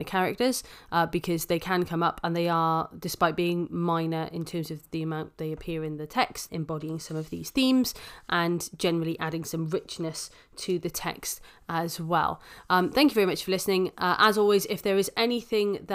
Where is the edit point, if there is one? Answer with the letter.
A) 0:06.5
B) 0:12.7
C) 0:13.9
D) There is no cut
A